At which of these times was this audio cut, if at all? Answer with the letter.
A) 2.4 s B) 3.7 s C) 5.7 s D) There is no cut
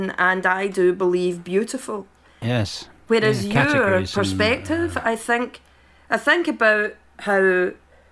A